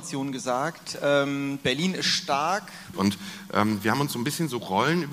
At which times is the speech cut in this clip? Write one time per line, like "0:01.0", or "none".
0:02.9

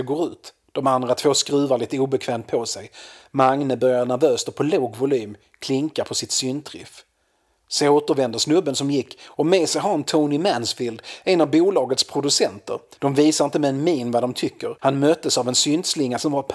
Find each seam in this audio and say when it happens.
0:13.0
0:14.8

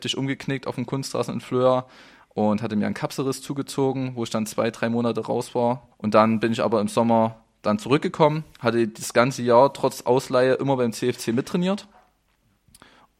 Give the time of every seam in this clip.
0:05.9

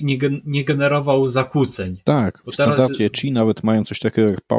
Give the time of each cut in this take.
none

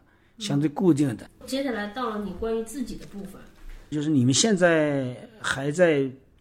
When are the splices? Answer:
0:01.3
0:03.9

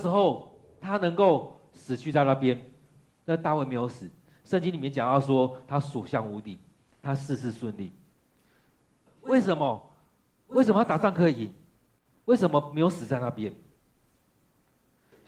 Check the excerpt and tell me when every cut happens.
0:09.1

